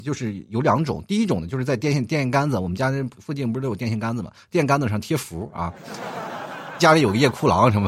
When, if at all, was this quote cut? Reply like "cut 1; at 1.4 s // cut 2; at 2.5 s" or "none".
cut 1; at 3.1 s // cut 2; at 6.8 s